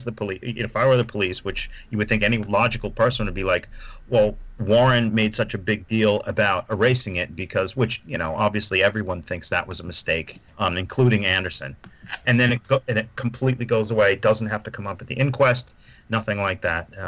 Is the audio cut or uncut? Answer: cut